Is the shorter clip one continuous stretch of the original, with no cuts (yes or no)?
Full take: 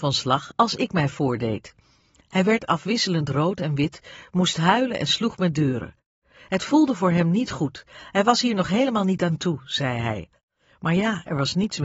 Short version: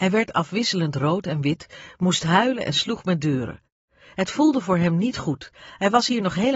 yes